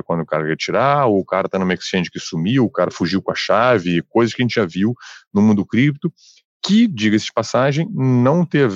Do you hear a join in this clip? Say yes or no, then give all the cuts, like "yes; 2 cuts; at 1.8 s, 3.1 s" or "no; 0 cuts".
no; 0 cuts